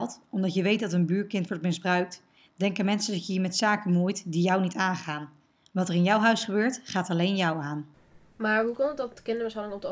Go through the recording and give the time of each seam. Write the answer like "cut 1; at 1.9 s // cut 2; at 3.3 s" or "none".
cut 1; at 8.3 s